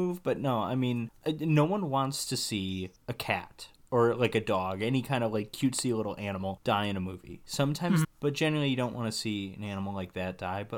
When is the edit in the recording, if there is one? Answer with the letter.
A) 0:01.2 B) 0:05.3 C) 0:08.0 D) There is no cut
C